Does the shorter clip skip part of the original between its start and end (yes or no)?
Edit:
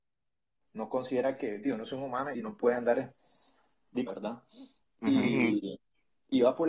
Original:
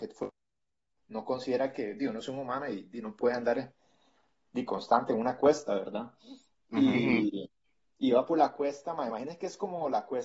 yes